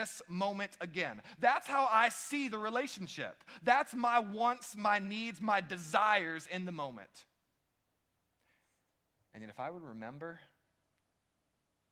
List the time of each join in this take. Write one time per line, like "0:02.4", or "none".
none